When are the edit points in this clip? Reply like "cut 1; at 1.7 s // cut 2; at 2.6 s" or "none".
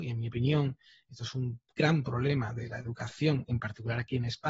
none